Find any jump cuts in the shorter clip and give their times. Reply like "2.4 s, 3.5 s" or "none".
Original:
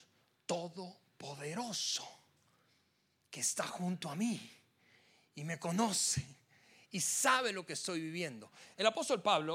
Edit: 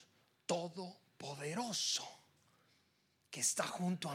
none

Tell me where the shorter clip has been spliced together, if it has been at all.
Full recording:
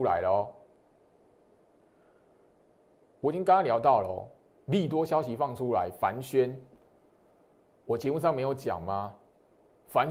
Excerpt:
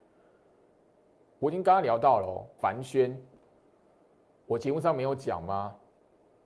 2.6 s

